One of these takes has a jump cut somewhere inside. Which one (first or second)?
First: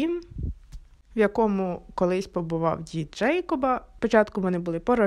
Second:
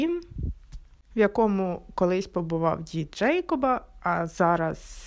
first